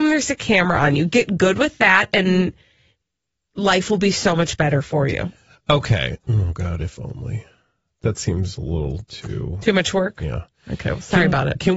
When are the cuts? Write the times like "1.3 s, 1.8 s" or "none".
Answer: 6.2 s